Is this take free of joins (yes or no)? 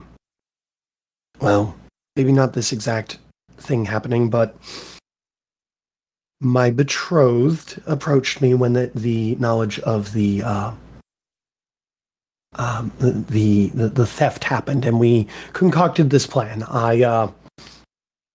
yes